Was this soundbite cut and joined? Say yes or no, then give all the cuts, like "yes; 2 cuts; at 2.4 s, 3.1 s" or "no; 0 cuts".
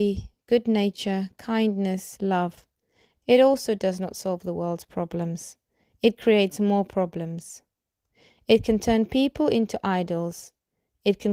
yes; 1 cut; at 3.2 s